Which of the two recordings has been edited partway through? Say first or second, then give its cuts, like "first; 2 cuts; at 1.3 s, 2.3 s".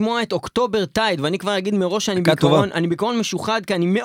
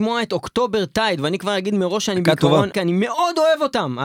second; 1 cut; at 2.7 s